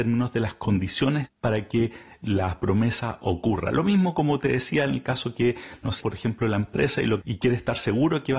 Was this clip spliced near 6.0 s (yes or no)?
yes